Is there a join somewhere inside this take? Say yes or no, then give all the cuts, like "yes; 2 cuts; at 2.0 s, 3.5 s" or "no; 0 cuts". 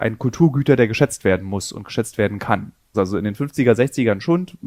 yes; 1 cut; at 2.9 s